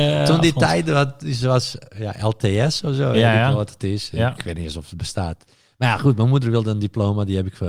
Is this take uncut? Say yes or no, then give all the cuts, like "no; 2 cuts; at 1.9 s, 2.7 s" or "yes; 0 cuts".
yes; 0 cuts